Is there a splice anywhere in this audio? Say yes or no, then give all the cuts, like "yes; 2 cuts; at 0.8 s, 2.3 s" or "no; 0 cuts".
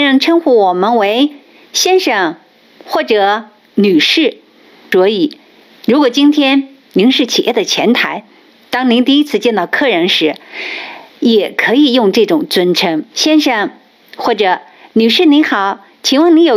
yes; 2 cuts; at 5.7 s, 13.1 s